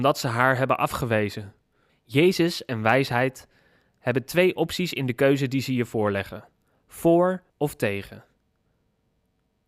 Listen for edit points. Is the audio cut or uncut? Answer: cut